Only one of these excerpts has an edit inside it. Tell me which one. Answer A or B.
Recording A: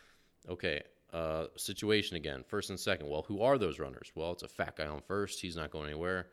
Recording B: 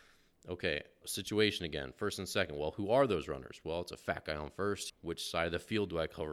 B